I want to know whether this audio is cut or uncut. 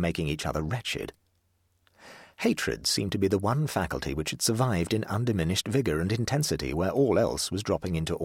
uncut